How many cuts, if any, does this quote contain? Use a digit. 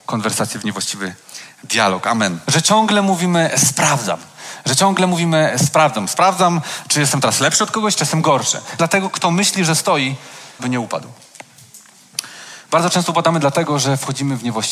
3